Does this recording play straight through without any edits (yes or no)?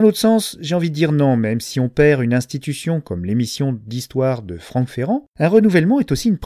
yes